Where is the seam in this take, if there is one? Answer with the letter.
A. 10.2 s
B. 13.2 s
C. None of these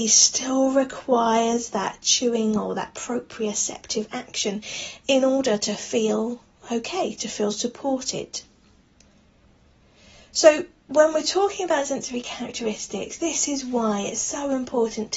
C